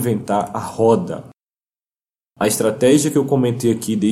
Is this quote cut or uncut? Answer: uncut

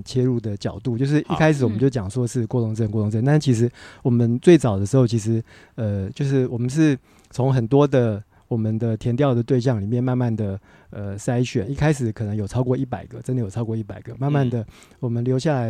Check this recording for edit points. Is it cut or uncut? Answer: uncut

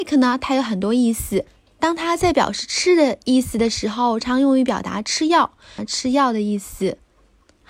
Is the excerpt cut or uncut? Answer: cut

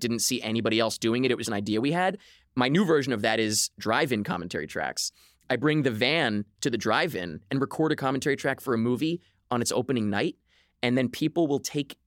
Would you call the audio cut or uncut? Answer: cut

